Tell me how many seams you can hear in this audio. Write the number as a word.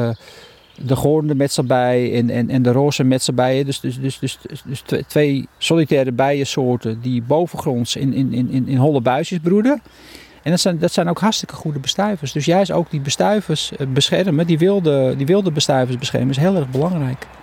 one